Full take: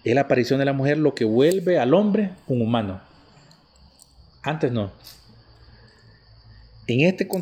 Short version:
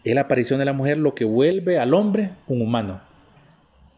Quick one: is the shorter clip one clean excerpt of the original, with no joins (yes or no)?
yes